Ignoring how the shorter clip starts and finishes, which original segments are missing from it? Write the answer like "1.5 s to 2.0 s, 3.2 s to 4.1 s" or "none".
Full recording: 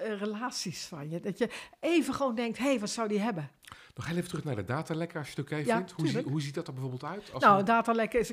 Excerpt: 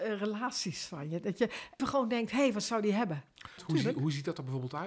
1.8 s to 2.1 s, 3.8 s to 5.9 s